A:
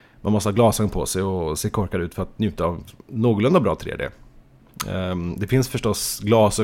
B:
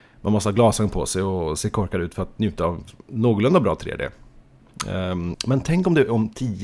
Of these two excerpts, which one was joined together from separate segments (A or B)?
B